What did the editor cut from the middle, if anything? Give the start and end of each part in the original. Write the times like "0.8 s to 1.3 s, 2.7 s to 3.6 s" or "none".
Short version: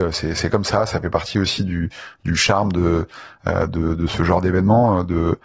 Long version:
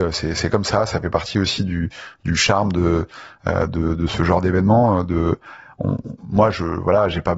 none